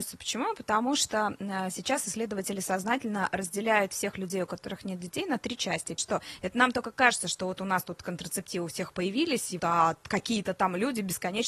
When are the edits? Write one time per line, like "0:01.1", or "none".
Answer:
0:06.0
0:09.6